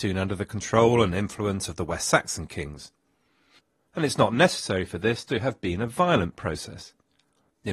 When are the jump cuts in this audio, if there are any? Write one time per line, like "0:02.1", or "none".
none